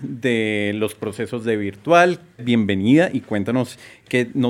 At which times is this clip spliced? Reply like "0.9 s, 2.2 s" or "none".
2.4 s